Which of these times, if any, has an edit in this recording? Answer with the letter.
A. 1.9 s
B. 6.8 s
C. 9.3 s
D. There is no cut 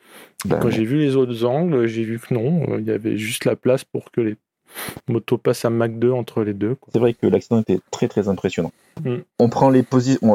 D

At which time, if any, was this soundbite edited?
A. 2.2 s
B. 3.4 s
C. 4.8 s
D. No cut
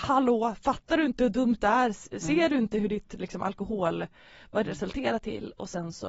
D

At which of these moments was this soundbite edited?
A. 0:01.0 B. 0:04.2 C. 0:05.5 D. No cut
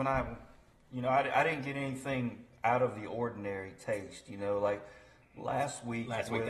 D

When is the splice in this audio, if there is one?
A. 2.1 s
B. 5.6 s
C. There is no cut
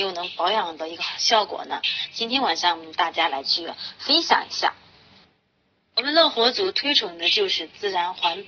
C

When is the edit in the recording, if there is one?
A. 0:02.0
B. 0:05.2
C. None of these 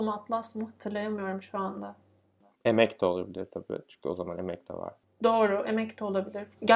C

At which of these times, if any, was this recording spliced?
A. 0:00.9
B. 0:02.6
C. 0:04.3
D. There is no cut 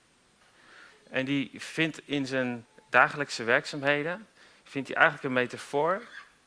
A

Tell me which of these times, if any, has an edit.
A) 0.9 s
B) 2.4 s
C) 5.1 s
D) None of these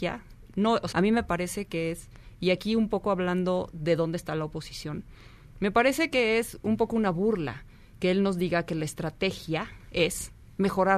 A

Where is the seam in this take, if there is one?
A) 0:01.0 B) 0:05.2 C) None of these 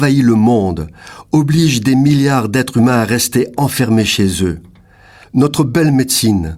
B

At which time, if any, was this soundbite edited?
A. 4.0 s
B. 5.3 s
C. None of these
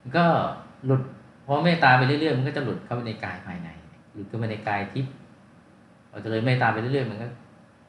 A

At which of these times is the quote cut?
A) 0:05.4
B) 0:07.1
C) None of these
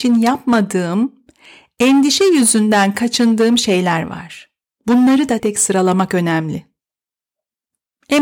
A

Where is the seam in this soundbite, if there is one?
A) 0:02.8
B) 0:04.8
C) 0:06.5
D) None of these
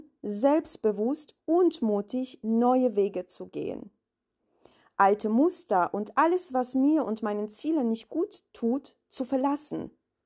D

